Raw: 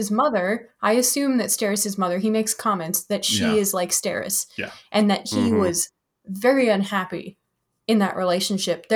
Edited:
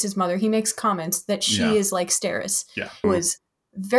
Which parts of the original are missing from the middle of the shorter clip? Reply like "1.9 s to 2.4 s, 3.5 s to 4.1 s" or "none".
4.9 s to 5.6 s

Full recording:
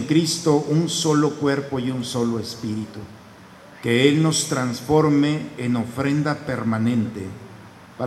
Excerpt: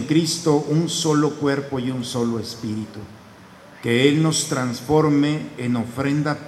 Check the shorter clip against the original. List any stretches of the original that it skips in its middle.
none

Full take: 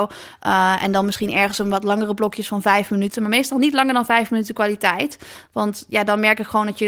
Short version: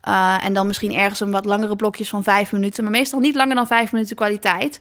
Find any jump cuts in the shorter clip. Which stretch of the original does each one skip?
none

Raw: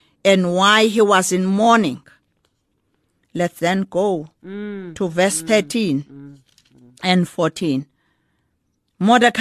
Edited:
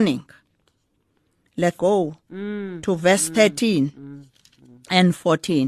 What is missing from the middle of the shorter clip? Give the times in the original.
3.5 s to 3.9 s

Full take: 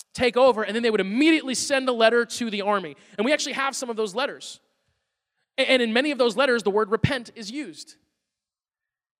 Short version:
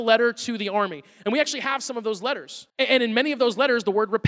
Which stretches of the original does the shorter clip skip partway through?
4.6 s to 5.5 s

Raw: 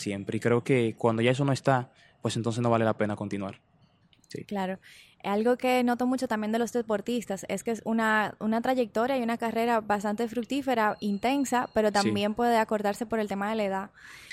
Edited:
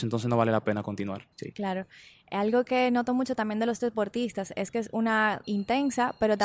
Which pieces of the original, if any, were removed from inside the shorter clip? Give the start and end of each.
3.7 s to 4.2 s, 8.4 s to 11.0 s

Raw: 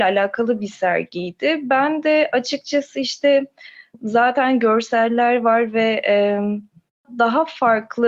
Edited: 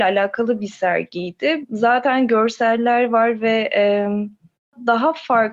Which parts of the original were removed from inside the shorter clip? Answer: 1.6 s to 3.9 s

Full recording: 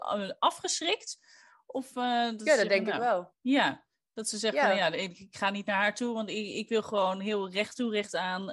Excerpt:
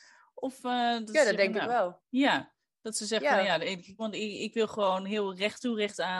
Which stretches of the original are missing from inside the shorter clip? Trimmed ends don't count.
5.3 s to 6.1 s

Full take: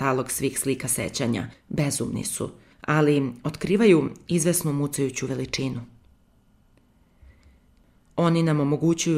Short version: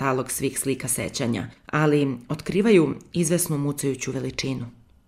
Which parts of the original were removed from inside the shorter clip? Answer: 1.5 s to 2.7 s

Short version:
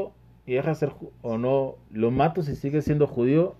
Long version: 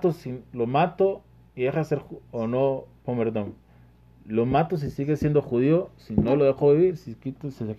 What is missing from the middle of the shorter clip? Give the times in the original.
3.0 s to 4.2 s

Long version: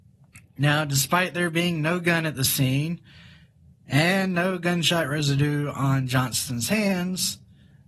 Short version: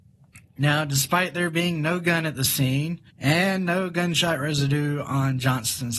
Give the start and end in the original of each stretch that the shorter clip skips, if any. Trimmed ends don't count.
3.1 s to 3.8 s

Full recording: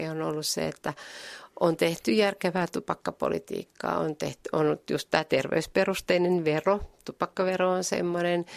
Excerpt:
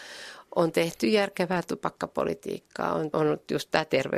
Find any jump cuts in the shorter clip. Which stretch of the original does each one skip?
4.2 s to 4.5 s

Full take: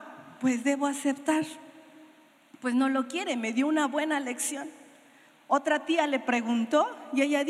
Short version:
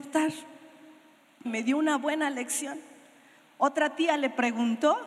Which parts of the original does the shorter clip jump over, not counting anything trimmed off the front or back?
2.6 s to 3.3 s

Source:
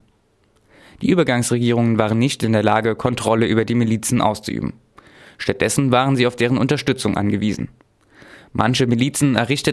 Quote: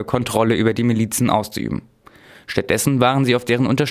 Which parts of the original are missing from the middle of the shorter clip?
none

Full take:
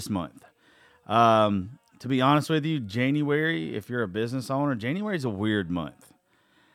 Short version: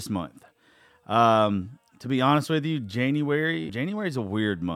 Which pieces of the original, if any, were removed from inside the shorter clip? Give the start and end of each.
3.7 s to 4.8 s

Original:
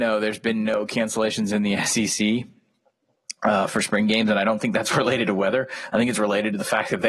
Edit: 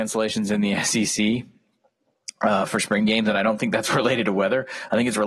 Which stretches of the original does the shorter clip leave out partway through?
none

